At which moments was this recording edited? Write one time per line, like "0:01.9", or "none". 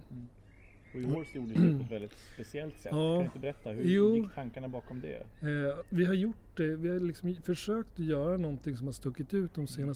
none

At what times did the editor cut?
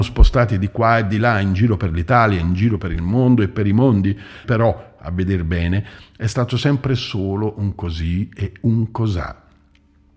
0:04.4

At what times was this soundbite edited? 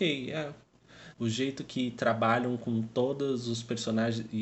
0:01.1

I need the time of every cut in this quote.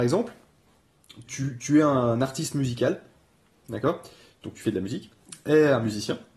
0:01.3

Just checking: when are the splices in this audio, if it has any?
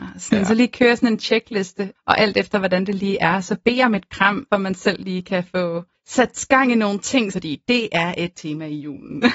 0:04.5
0:07.3

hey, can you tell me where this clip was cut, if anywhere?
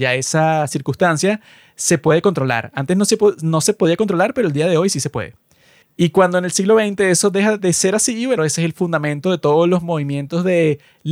0:05.8
0:08.4

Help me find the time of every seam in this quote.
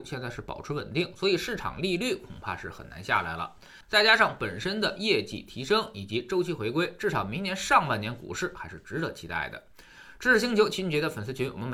0:03.8

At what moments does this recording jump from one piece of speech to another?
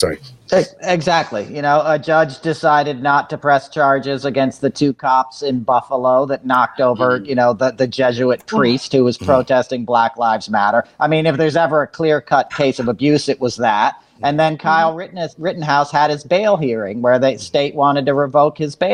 0:12.5

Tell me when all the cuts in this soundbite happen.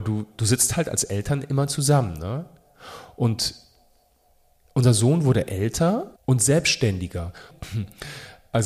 0:06.2
0:07.5

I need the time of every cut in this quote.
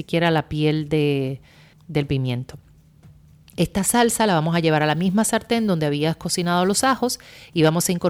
0:01.7

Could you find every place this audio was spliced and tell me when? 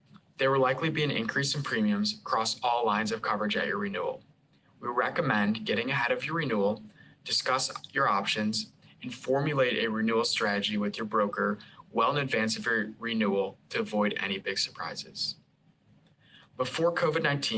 none

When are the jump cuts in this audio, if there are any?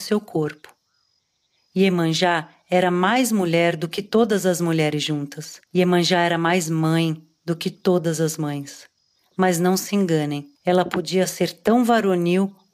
0:05.7
0:10.5

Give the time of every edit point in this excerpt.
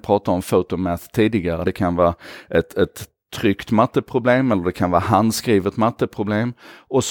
0:01.6

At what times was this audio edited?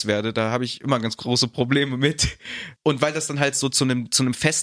0:02.8

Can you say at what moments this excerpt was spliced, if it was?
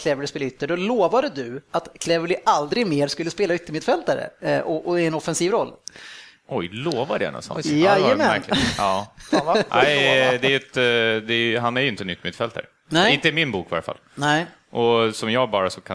0:09.7

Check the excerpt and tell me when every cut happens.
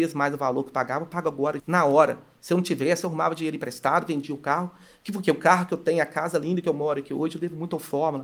0:01.6

